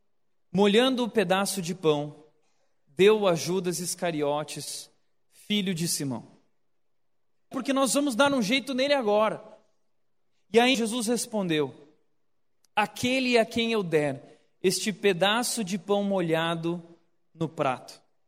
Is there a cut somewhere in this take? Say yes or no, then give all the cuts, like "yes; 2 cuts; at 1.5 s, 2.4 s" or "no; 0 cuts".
yes; 2 cuts; at 7.5 s, 10.7 s